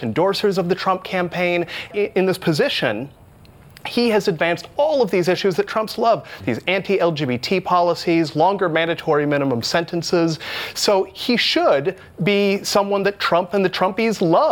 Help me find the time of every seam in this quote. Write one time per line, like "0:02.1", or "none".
0:01.9
0:06.4